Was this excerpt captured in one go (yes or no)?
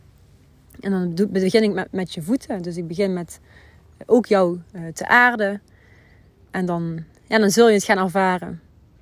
yes